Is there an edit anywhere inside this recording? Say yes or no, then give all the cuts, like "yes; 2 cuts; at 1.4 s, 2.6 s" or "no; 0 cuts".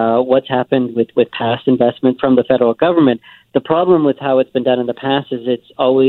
yes; 1 cut; at 2.2 s